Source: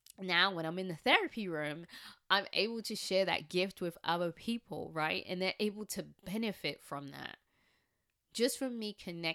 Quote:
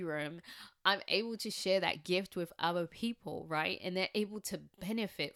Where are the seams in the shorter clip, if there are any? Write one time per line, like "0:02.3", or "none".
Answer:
none